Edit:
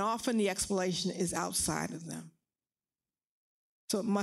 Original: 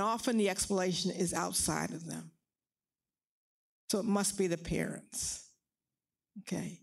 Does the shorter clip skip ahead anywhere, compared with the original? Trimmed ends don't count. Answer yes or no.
no